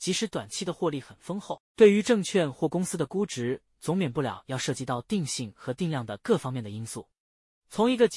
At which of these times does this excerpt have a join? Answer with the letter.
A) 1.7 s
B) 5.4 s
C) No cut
A